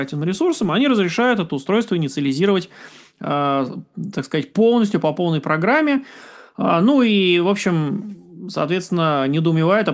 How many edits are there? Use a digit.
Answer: 0